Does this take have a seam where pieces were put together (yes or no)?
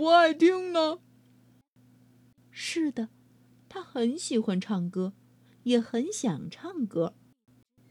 yes